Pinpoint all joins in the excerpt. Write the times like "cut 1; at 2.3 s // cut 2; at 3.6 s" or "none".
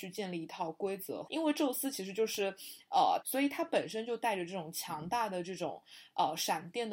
cut 1; at 1.3 s // cut 2; at 3.2 s